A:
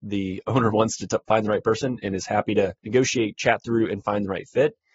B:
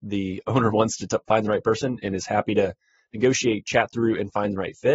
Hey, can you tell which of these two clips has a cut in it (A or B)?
A